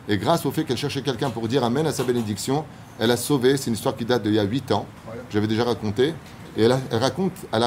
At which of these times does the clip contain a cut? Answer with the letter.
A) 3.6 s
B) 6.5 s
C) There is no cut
C